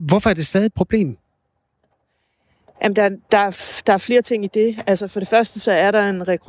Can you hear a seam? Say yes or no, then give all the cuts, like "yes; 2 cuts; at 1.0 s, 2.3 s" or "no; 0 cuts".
no; 0 cuts